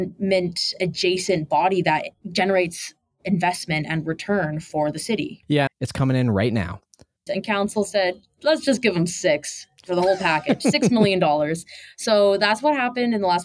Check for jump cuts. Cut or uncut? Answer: cut